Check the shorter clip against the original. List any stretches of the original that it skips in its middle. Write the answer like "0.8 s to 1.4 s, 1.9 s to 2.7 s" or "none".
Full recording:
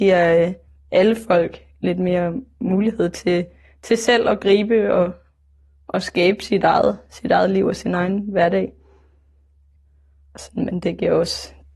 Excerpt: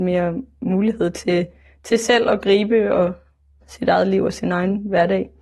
5.6 s to 7.0 s